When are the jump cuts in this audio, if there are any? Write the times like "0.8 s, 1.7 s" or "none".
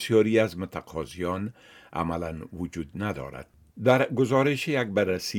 3.7 s